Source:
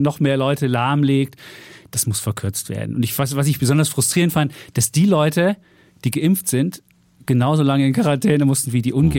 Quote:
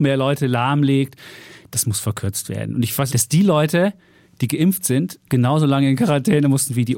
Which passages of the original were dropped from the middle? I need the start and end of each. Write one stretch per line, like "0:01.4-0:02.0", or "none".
0:03.3-0:04.7
0:06.9-0:07.2